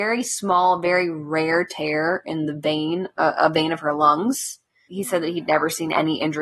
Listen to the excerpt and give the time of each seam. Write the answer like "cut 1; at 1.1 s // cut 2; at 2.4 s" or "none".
cut 1; at 4.9 s